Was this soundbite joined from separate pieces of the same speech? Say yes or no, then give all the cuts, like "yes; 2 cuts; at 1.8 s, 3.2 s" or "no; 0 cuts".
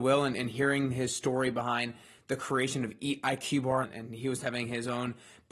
yes; 1 cut; at 3.8 s